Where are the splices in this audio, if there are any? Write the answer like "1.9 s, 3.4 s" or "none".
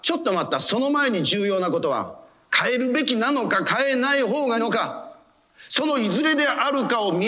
4.5 s